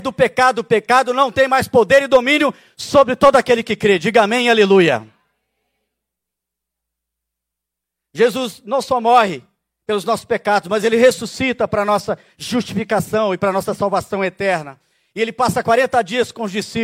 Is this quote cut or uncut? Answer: uncut